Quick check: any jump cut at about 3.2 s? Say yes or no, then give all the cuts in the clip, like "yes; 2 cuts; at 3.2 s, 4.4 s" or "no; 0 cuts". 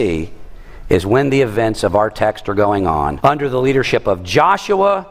yes; 1 cut; at 3.2 s